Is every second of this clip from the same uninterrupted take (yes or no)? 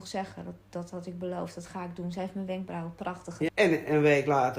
no